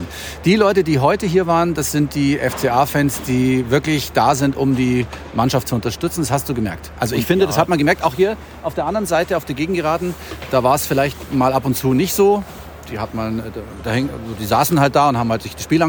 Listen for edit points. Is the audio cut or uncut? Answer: uncut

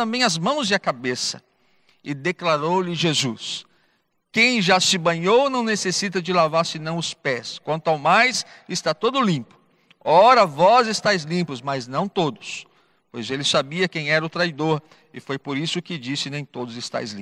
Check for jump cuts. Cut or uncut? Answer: uncut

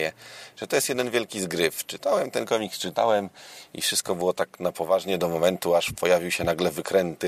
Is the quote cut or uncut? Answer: uncut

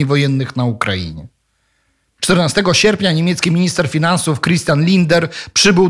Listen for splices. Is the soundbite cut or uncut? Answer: cut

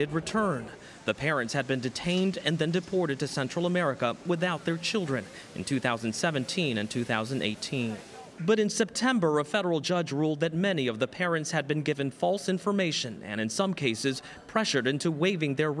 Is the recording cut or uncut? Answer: uncut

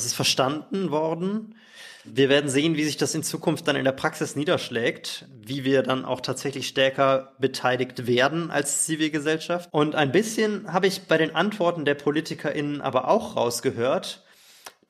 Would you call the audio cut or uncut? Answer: cut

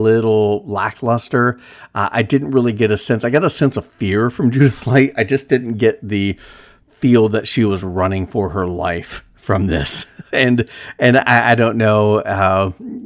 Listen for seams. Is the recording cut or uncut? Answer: uncut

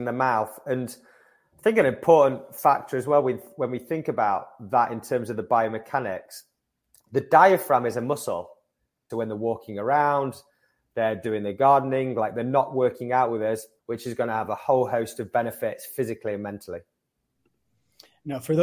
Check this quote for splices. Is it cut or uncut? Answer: cut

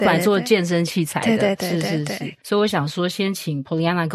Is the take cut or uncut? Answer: cut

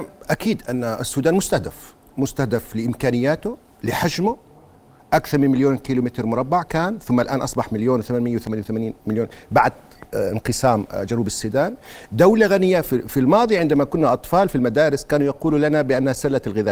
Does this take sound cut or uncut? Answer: uncut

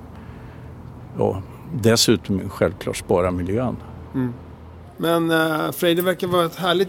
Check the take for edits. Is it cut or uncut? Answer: uncut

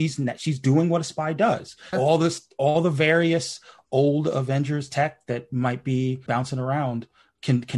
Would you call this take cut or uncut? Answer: cut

